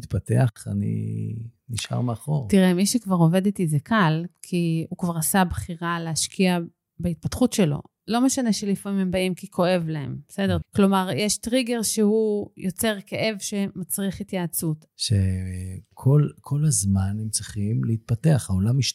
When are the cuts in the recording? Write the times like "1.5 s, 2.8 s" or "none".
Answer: 10.6 s, 14.9 s